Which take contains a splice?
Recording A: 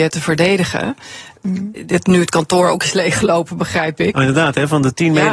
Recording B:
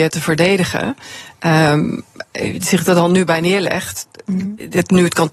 A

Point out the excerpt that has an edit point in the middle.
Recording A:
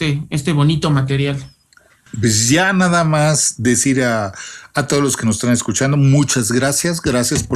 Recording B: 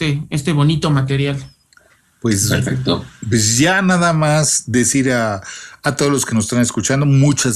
A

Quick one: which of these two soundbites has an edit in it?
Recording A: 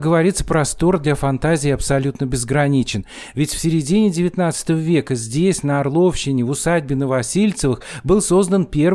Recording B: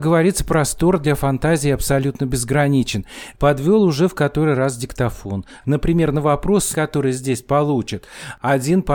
B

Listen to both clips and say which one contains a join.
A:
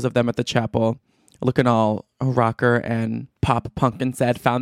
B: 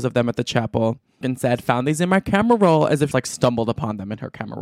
B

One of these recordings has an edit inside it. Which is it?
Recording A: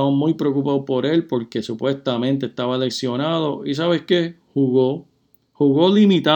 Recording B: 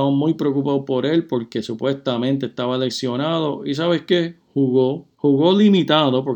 B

